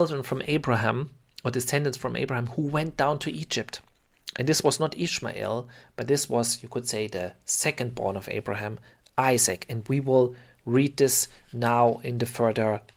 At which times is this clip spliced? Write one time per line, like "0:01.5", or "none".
none

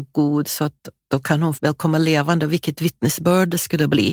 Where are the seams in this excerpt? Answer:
0:01.5

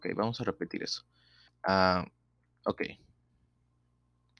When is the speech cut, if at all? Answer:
0:01.5

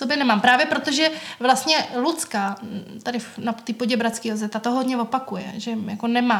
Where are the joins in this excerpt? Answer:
0:05.5

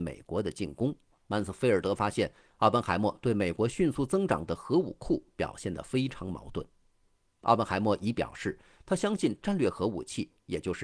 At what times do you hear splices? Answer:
0:01.1

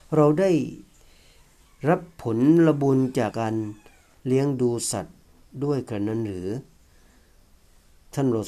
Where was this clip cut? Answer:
0:03.3

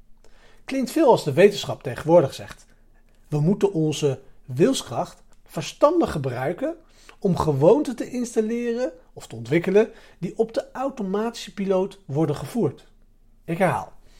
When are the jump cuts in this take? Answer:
none

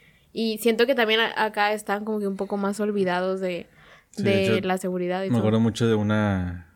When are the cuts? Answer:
none

